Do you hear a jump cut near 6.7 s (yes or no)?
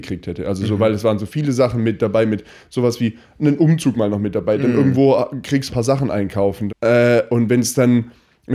yes